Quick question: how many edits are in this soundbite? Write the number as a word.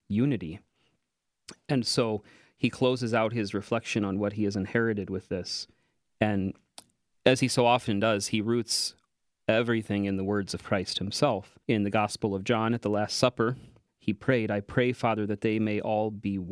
two